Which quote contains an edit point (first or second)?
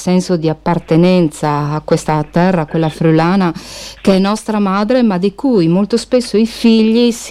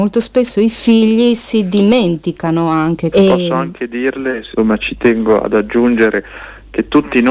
second